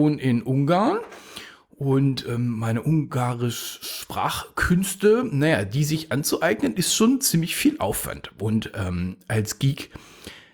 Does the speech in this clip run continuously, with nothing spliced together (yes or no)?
yes